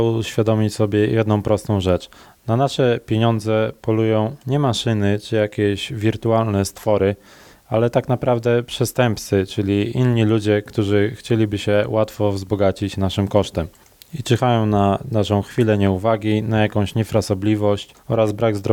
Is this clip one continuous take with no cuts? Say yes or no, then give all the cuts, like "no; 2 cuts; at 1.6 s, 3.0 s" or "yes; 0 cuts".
yes; 0 cuts